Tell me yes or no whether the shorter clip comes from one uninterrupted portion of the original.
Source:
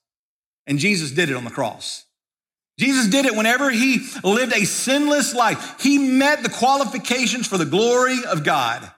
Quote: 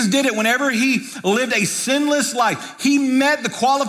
yes